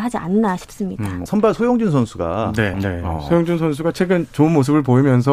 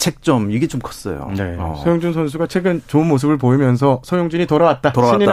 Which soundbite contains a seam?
first; 2 cuts; at 1.3 s, 2.7 s

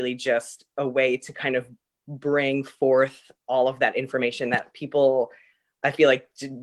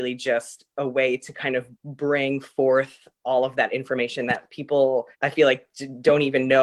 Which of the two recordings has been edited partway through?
second; 2 cuts; at 1.7 s, 5.1 s

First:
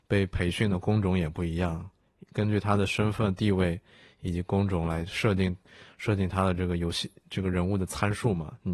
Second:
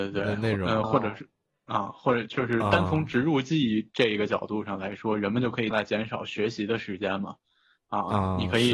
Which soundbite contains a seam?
second; 1 cut; at 5.7 s

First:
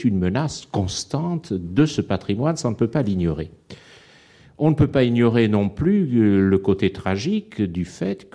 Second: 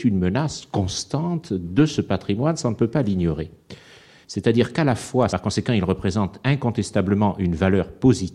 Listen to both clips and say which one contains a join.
second; 2 cuts; at 4.2 s, 5.3 s

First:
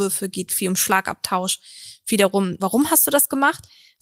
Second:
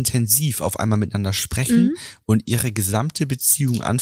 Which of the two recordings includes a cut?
first; 1 cut; at 2.6 s

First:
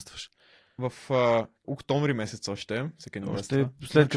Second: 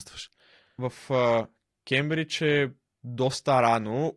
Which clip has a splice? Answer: first; 1 cut; at 1.6 s

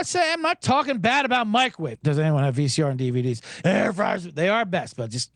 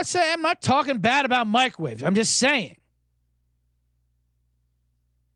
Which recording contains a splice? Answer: first; 2 cuts; at 2.0 s, 3.6 s

